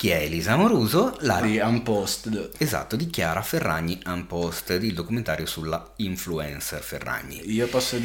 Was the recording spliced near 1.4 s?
yes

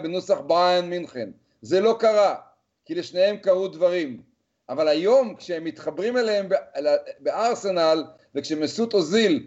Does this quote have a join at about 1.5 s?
no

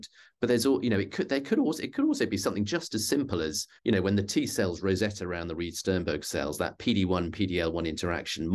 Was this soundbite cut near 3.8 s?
yes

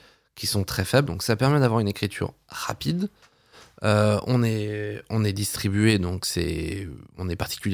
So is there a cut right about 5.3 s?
no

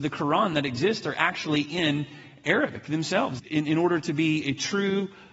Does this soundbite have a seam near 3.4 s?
yes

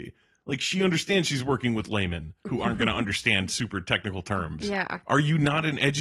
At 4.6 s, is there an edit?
yes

